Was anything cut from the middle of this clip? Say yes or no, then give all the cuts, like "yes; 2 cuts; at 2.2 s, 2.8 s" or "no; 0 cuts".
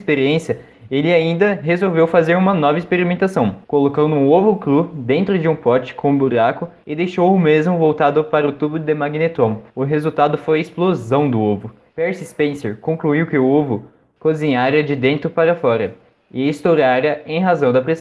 yes; 2 cuts; at 3.6 s, 9.7 s